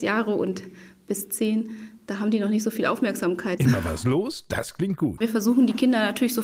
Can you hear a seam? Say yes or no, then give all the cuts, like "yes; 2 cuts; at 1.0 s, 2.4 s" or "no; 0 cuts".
yes; 2 cuts; at 3.6 s, 5.2 s